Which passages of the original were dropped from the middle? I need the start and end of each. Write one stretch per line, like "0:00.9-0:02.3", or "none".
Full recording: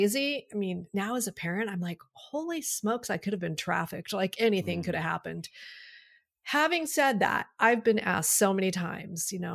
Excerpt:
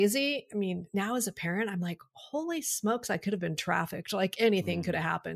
none